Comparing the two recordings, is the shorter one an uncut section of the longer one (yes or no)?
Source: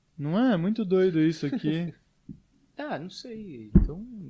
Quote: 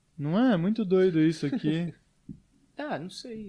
yes